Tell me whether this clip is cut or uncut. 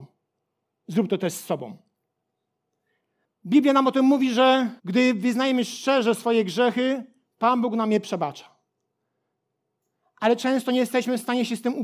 cut